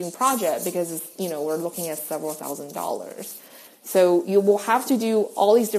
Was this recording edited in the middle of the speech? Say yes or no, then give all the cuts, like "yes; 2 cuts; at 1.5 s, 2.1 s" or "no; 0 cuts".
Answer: yes; 1 cut; at 3.7 s